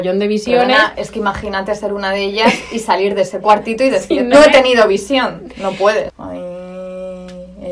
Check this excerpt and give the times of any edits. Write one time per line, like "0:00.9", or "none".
0:04.3
0:06.1